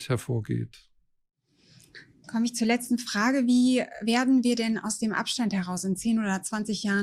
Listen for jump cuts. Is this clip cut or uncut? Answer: uncut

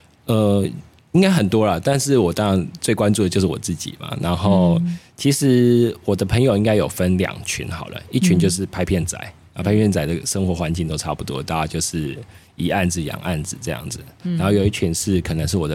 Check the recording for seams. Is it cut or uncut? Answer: uncut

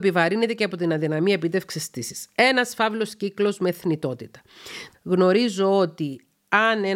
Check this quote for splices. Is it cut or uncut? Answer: cut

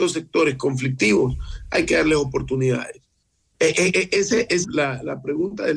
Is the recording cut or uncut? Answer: cut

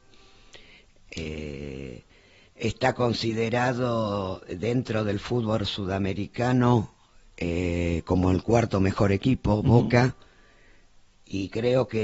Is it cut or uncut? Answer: uncut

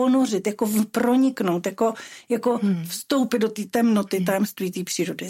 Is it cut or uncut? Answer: uncut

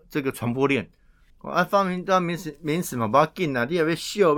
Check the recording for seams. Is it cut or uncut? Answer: cut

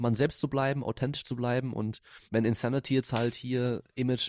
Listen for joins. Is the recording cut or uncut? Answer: cut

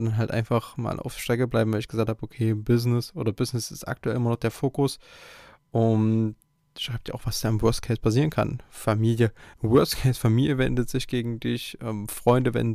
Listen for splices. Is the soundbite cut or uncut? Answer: uncut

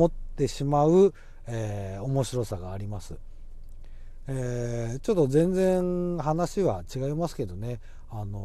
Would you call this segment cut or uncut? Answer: uncut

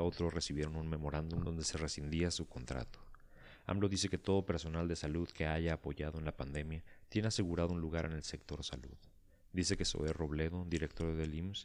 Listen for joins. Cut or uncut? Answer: uncut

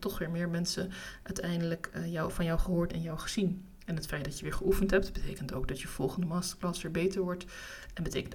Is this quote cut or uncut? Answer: uncut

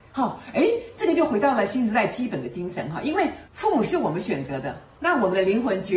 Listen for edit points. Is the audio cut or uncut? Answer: uncut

